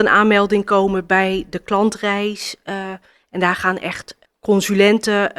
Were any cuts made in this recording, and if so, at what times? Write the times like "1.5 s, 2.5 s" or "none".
none